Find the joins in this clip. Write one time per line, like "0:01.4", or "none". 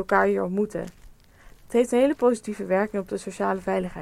0:01.6